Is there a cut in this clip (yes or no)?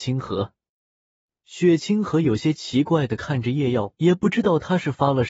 yes